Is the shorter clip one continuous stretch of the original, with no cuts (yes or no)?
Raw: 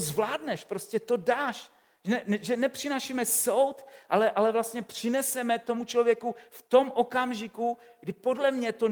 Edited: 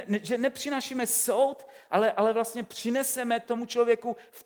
yes